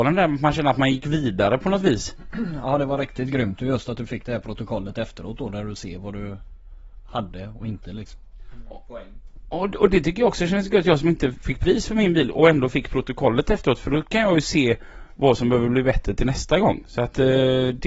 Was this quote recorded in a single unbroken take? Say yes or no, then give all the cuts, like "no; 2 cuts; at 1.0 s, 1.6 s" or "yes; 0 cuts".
yes; 0 cuts